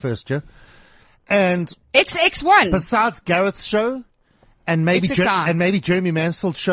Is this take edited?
yes; 1 cut; at 1.8 s

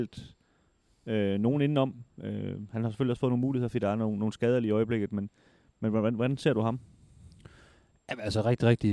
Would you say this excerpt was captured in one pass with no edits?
yes; 0 cuts

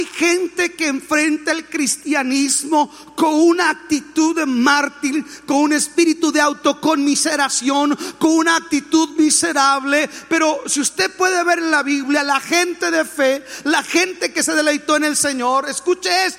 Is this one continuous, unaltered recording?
yes; 0 cuts

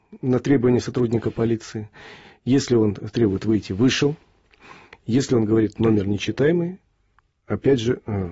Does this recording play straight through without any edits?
yes; 0 cuts

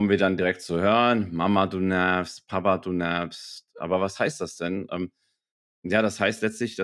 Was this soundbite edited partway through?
no; 0 cuts

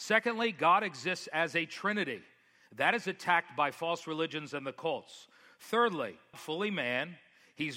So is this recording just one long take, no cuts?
no; 1 cut; at 6.3 s

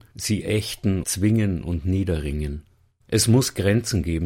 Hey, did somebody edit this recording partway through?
yes; 2 cuts; at 1.0 s, 2.9 s

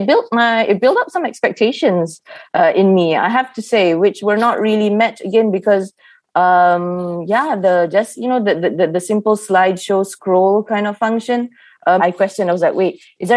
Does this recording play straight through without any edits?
no; 1 cut; at 12.0 s

